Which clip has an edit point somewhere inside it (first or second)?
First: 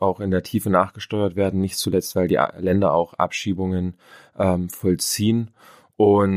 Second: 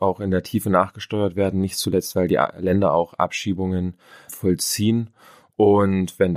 second